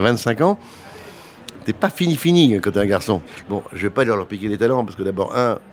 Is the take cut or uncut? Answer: cut